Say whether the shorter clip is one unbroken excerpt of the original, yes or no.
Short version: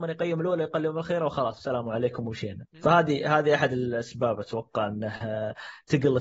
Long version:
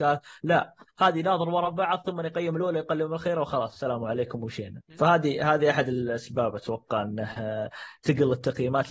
yes